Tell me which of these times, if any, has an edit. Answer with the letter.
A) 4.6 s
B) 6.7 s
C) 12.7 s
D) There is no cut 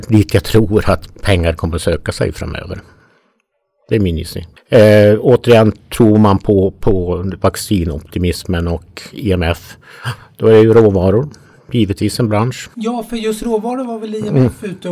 C